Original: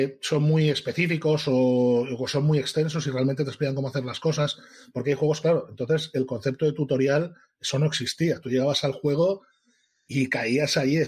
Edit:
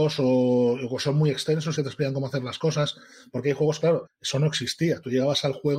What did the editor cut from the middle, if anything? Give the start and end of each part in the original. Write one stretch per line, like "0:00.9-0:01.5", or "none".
0:03.0-0:03.4
0:05.7-0:07.4